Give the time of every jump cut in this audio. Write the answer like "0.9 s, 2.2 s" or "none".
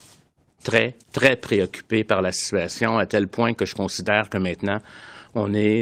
1.0 s

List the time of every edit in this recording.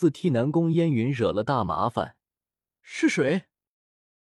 2.7 s

